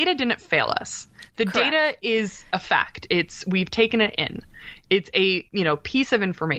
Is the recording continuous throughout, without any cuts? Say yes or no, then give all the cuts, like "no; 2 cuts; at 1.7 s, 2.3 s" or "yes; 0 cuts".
yes; 0 cuts